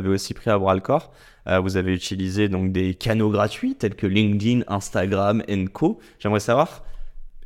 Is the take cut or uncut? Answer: uncut